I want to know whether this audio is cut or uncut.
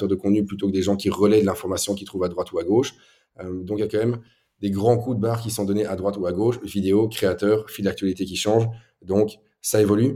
uncut